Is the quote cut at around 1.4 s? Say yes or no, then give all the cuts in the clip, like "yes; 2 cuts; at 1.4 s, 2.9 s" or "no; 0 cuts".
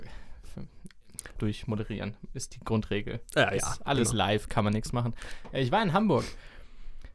yes; 1 cut; at 1.4 s